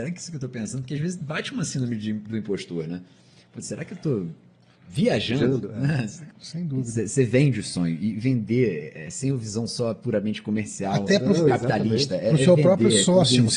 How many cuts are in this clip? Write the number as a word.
one